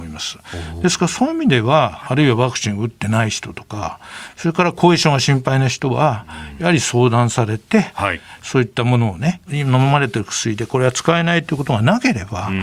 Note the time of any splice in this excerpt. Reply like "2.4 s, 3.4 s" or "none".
2.0 s, 9.5 s